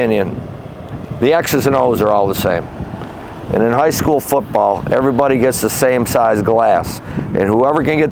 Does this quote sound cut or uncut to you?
uncut